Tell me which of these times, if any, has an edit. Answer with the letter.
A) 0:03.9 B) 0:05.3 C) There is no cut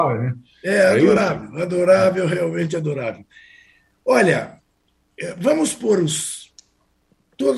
C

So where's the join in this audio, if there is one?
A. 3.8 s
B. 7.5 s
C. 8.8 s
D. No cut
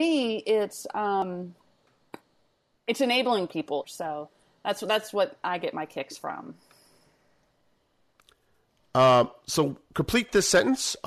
A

